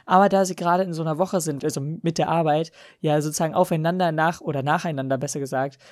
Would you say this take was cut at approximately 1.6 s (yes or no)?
yes